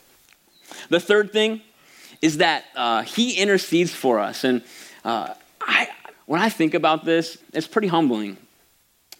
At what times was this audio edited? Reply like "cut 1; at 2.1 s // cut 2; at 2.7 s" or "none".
cut 1; at 6.1 s // cut 2; at 7.4 s

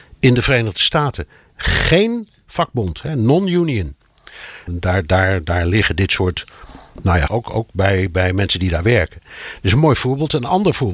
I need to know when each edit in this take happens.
cut 1; at 4.7 s // cut 2; at 7.3 s

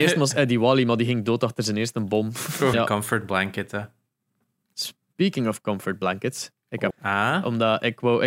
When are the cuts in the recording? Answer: cut 1; at 2.7 s // cut 2; at 6.9 s

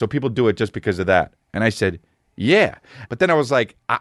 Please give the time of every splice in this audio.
cut 1; at 3.1 s

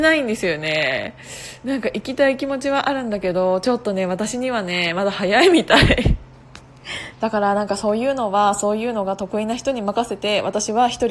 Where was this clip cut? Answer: cut 1; at 7.1 s

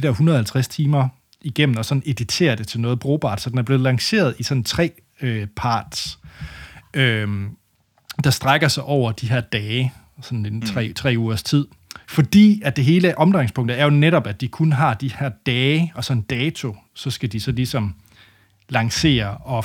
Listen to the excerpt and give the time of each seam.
cut 1; at 12.0 s

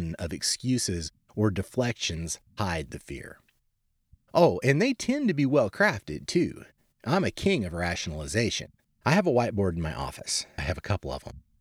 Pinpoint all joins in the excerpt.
cut 1; at 8.9 s // cut 2; at 10.6 s

